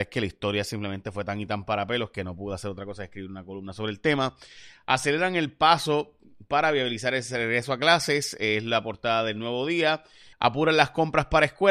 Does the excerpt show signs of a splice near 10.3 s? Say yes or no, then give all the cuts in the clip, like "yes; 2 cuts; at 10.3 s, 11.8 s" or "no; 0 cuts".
yes; 1 cut; at 10.3 s